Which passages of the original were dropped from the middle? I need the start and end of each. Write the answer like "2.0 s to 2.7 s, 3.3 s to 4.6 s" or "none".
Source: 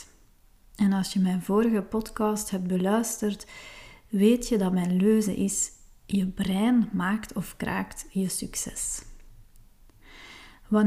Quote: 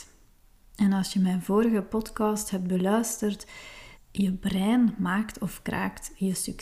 3.9 s to 5.9 s